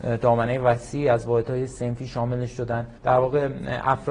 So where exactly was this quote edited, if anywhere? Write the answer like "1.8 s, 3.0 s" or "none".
3.0 s